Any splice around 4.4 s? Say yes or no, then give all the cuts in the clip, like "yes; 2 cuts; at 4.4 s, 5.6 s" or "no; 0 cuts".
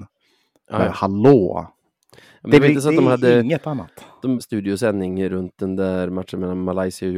yes; 1 cut; at 4.4 s